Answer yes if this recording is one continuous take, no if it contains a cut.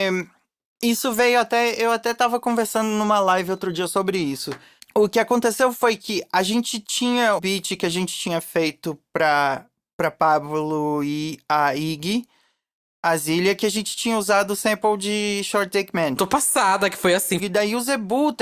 no